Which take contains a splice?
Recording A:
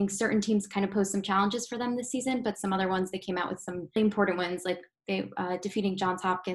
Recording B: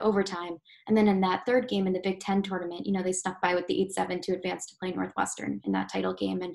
A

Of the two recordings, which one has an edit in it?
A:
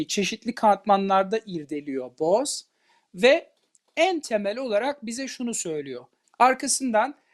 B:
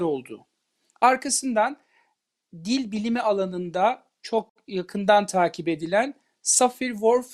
A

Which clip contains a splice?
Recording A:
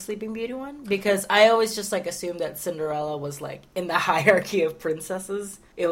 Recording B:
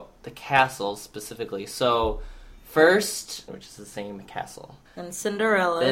B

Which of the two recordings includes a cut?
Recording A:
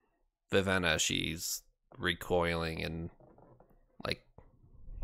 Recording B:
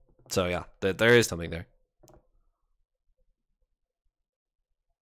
B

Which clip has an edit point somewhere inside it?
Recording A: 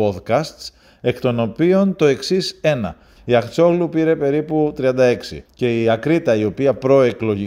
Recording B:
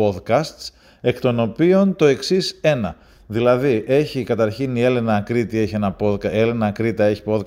A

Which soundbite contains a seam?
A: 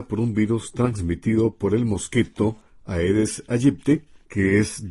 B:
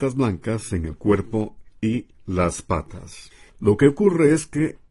B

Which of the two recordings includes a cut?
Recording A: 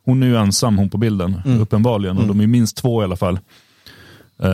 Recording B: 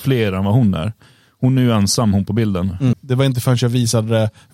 B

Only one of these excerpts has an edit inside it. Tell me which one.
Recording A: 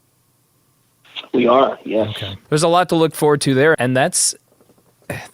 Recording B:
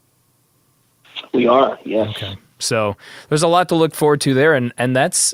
A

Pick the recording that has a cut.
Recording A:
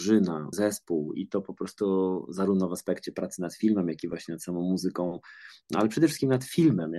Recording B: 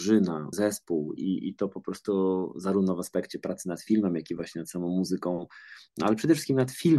A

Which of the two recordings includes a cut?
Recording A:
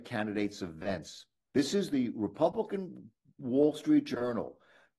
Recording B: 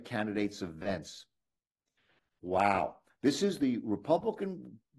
A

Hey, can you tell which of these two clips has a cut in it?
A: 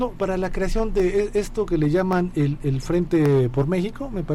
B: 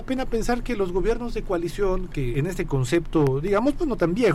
B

